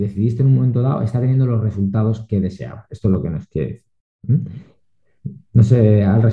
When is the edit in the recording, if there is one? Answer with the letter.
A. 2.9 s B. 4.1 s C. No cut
C